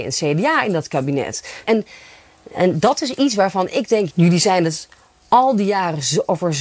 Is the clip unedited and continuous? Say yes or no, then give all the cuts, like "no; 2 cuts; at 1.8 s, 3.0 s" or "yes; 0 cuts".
no; 2 cuts; at 1.6 s, 4.1 s